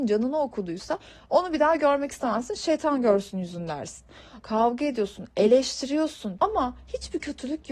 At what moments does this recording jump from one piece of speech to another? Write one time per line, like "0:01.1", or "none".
0:04.4
0:06.4